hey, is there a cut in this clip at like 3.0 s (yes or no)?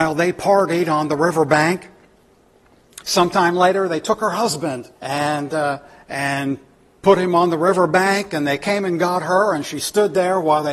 no